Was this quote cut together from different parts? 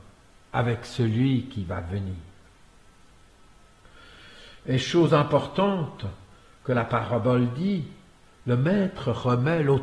no; 0 cuts

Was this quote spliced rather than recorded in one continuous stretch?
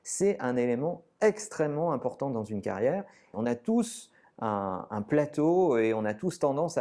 yes; 1 cut; at 3.3 s

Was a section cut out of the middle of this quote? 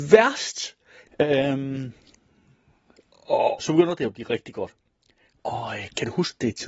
yes; 3 cuts; at 1.1 s, 3.6 s, 5.4 s

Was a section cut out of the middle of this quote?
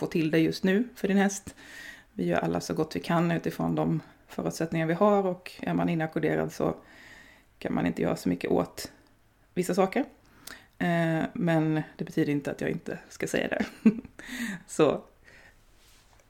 no; 0 cuts

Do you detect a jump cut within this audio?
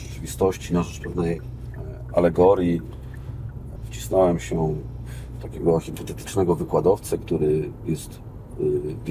yes; 1 cut; at 3.8 s

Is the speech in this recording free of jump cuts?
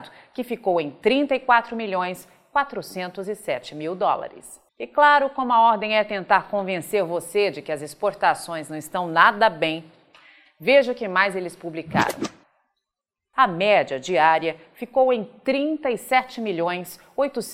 no; 2 cuts; at 4.7 s, 13.3 s

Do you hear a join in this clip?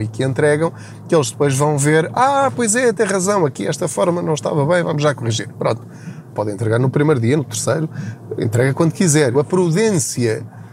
yes; 3 cuts; at 6.3 s, 7.4 s, 9.3 s

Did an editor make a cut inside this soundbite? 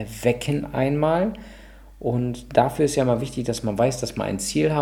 no; 0 cuts

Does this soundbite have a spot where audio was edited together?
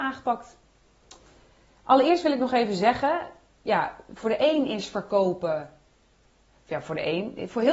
no; 0 cuts

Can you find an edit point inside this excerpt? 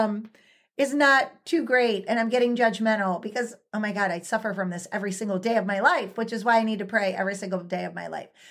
no; 0 cuts

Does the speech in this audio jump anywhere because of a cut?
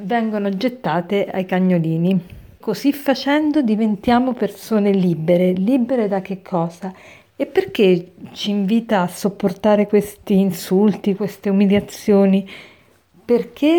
yes; 3 cuts; at 2.6 s, 7.3 s, 11.2 s

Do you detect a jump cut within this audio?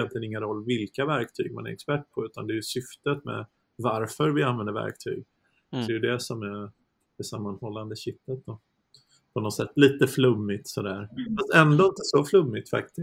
yes; 1 cut; at 5.9 s

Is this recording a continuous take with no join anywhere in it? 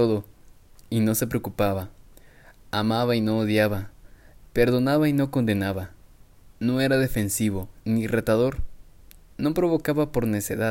no; 1 cut; at 7.8 s

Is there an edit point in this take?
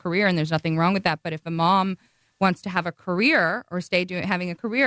no; 0 cuts

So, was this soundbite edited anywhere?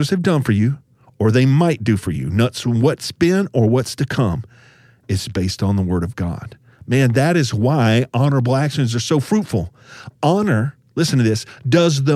no; 0 cuts

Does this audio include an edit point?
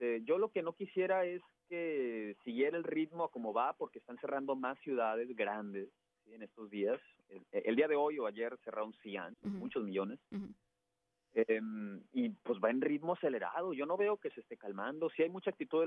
yes; 1 cut; at 9.3 s

